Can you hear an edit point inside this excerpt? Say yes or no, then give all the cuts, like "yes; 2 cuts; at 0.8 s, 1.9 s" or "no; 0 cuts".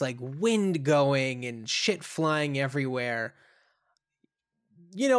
no; 0 cuts